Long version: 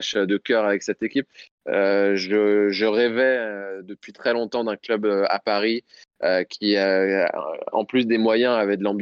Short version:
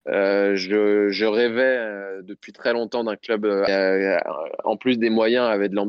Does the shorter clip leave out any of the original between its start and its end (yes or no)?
yes